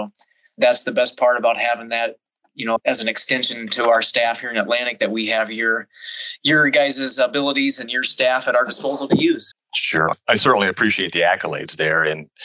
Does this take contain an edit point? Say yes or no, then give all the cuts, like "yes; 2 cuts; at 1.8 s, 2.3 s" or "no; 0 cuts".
yes; 1 cut; at 9.5 s